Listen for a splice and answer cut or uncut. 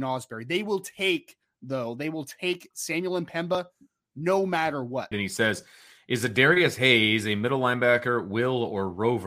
cut